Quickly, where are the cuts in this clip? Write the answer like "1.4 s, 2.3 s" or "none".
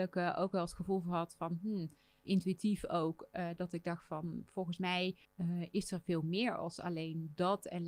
2.2 s, 5.2 s

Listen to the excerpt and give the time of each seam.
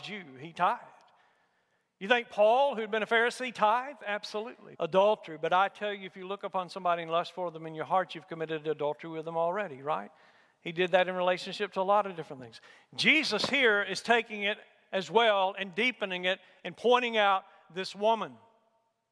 4.7 s

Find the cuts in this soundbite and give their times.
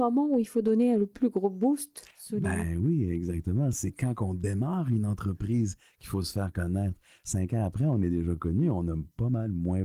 none

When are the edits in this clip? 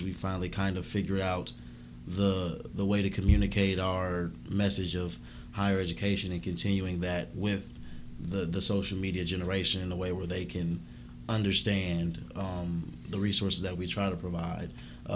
none

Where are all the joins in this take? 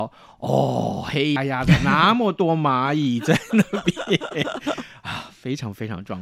1.4 s

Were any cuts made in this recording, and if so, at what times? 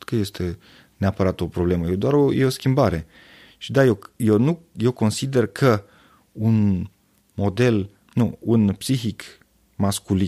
none

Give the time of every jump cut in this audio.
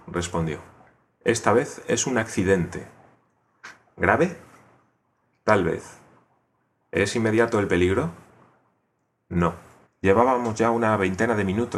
9.8 s

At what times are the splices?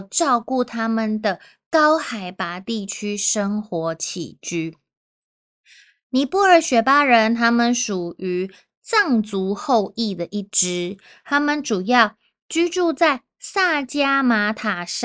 none

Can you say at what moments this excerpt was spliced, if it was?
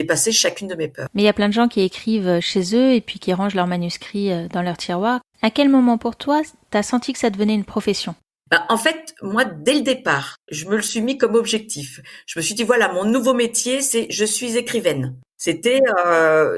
none

